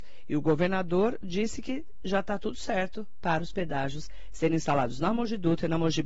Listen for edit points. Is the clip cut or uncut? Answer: uncut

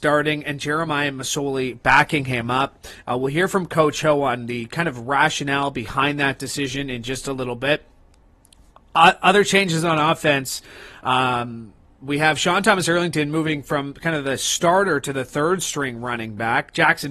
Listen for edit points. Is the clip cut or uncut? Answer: uncut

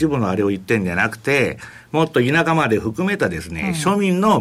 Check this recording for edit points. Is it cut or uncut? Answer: uncut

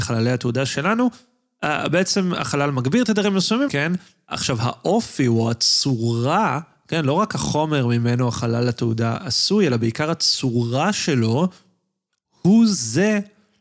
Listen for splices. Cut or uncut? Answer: cut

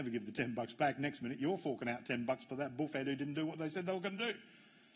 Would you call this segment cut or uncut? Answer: uncut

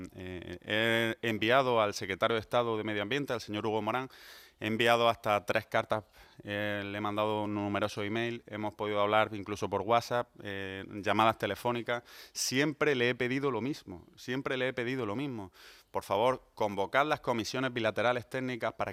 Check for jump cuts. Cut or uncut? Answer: uncut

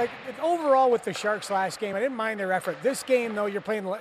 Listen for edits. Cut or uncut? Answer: uncut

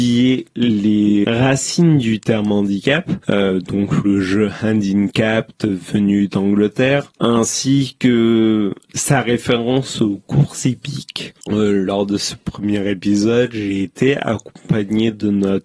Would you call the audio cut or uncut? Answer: cut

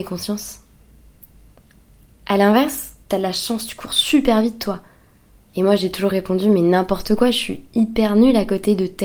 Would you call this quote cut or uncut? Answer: cut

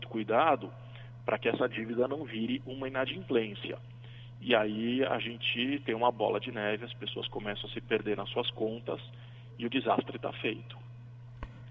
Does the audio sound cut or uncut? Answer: uncut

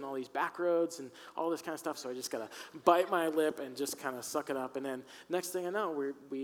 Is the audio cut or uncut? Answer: cut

